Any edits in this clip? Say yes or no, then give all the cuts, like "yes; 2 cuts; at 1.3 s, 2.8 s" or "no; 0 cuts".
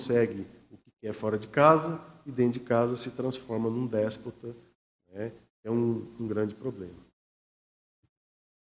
no; 0 cuts